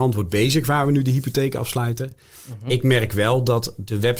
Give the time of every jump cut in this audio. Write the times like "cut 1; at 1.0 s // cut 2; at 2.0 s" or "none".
none